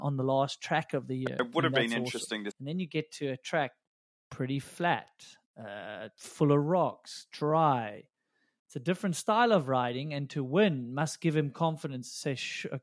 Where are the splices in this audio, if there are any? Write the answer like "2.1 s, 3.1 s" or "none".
2.5 s